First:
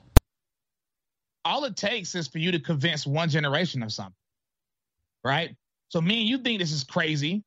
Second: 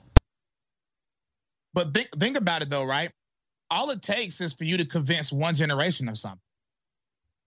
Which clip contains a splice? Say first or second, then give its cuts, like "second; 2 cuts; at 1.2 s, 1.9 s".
first; 1 cut; at 1.3 s